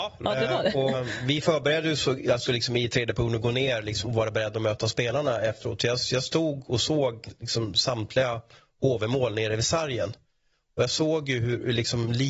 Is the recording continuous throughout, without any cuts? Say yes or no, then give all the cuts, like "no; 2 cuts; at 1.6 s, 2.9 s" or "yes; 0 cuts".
no; 2 cuts; at 0.9 s, 4.0 s